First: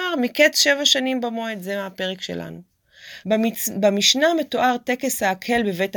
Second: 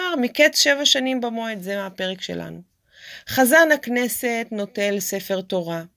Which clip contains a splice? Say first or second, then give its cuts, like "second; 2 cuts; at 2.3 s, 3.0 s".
first; 1 cut; at 3.2 s